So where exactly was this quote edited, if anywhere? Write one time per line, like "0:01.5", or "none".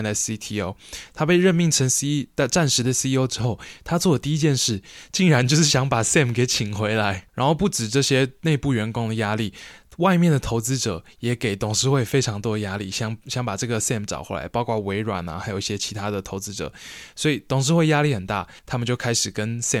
none